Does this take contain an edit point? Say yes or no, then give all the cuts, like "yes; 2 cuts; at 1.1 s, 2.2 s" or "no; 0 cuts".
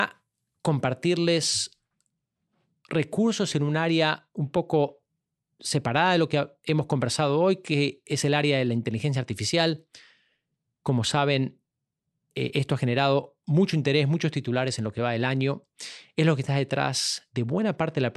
no; 0 cuts